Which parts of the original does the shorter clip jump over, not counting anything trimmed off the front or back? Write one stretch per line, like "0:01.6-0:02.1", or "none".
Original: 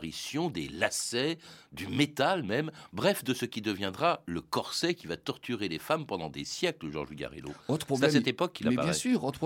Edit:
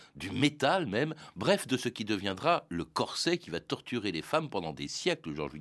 none